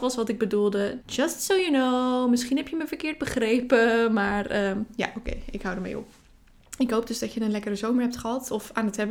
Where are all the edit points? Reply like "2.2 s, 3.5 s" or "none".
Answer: 1.0 s